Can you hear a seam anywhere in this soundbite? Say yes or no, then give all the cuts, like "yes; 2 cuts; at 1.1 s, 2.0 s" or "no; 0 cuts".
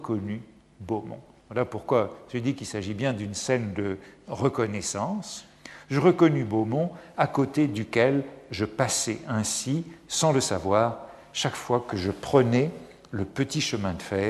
no; 0 cuts